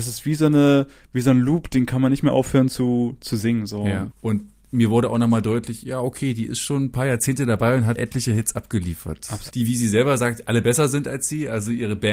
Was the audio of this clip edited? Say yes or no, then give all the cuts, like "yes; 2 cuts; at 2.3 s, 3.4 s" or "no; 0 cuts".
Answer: yes; 3 cuts; at 4.1 s, 8.0 s, 9.5 s